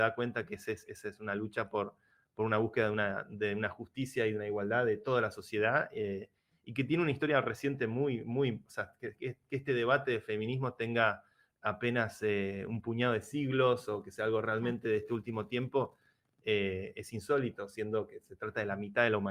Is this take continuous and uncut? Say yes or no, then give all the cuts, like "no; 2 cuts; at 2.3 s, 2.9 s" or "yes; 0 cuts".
yes; 0 cuts